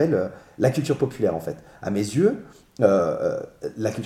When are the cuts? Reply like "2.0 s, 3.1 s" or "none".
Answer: none